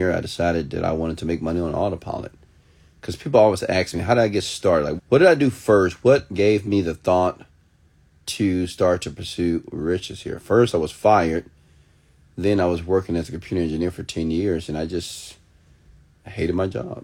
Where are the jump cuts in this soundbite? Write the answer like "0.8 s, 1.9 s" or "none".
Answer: 5.0 s